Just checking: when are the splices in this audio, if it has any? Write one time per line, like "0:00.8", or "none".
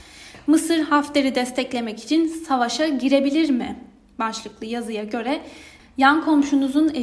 none